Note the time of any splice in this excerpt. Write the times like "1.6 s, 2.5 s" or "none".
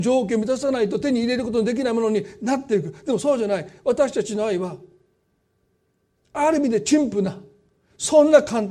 none